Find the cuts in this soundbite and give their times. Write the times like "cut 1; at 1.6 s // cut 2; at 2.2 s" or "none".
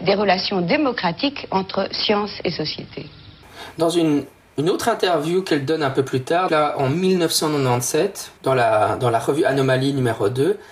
cut 1; at 6.5 s // cut 2; at 8.4 s